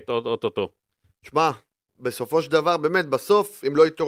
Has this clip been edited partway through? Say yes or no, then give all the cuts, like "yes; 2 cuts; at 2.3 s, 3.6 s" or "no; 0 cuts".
no; 0 cuts